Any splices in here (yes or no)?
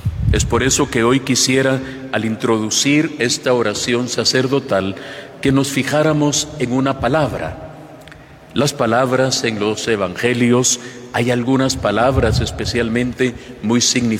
no